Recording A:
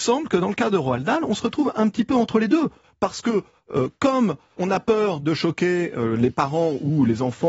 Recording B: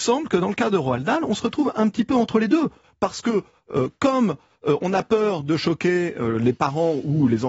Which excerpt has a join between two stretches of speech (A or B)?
A